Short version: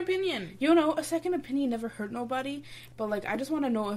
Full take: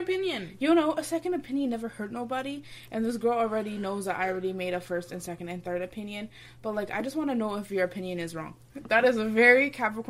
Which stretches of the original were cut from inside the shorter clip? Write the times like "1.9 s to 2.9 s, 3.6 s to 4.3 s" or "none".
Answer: 2.9 s to 6.5 s